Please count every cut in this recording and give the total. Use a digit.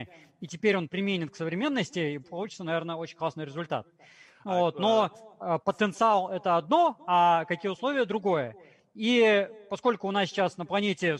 0